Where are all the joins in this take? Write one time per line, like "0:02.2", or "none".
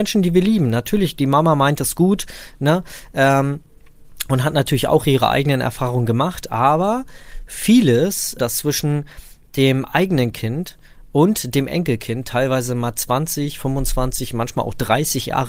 0:08.4